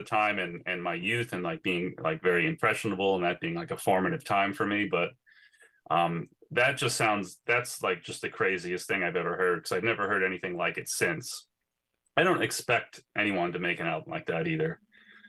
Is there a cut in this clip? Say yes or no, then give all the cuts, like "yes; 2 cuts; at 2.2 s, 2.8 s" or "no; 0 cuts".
no; 0 cuts